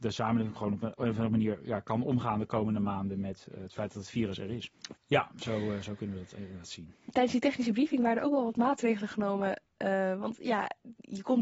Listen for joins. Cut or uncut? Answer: cut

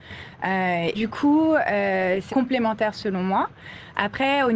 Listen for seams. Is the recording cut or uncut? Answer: cut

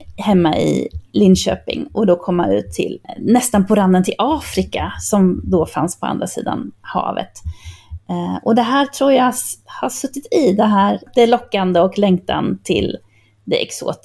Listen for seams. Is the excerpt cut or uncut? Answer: uncut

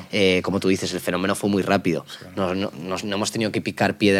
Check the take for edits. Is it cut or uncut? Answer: uncut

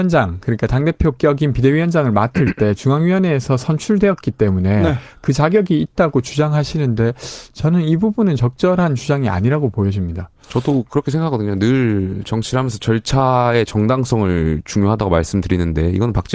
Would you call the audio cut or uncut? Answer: uncut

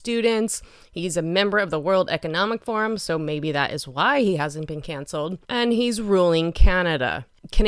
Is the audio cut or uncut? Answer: cut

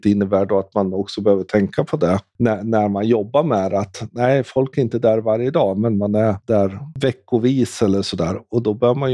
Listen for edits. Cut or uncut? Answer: uncut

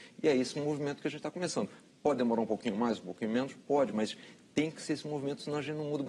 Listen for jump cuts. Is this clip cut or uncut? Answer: uncut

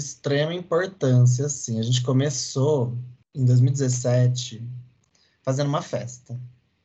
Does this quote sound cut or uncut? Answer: cut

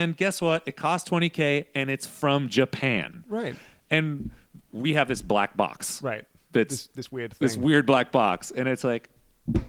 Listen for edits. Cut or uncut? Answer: uncut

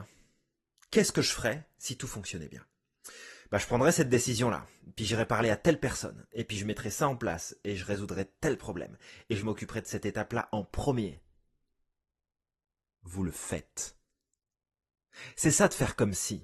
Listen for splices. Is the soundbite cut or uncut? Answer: uncut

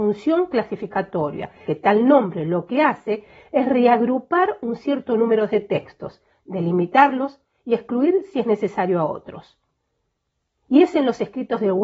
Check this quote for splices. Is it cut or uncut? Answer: cut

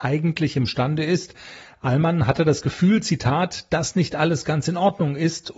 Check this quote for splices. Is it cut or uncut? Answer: uncut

